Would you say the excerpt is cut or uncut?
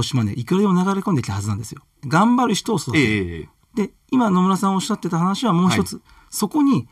cut